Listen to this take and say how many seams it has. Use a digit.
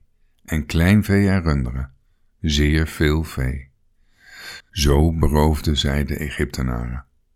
1